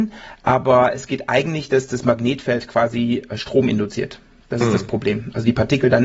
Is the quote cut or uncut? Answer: uncut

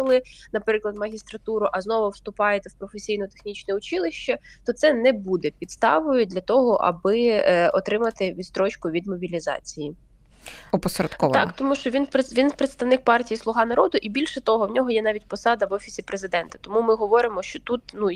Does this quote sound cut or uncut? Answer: cut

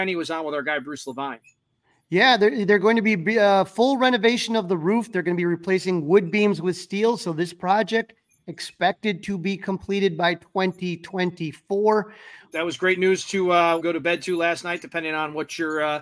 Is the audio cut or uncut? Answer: cut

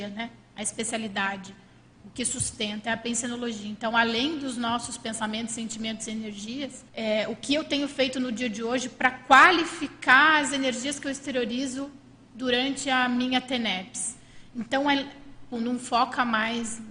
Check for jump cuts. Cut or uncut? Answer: cut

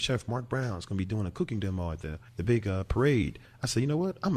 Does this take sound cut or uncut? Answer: cut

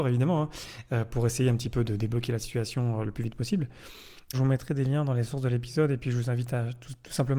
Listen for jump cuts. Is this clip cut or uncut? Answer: cut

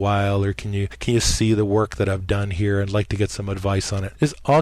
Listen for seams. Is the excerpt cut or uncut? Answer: uncut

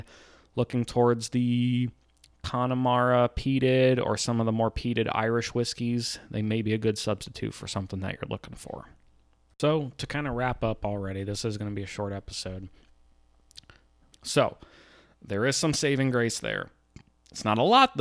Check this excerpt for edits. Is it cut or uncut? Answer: cut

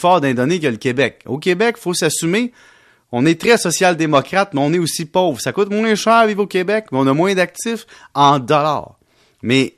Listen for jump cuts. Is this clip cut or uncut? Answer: uncut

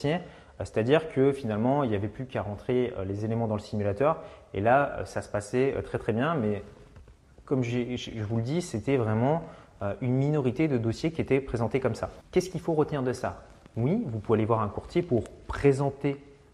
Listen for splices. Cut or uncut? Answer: uncut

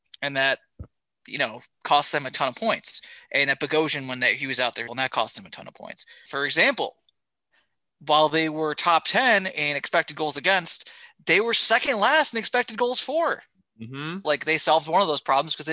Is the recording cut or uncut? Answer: cut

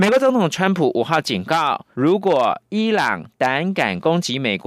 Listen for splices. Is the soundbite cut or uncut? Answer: cut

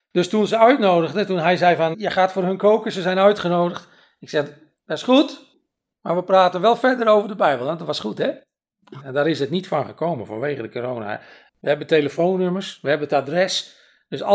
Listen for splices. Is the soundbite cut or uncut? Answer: cut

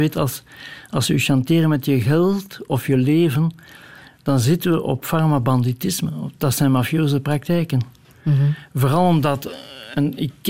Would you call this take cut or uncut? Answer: uncut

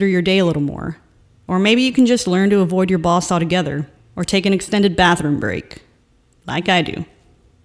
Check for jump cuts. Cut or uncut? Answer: cut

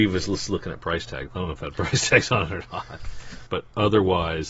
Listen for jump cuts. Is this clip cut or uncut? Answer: cut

